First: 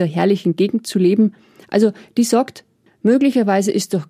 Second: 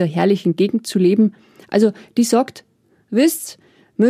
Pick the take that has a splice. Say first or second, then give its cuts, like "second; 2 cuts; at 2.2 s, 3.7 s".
first; 1 cut; at 2.9 s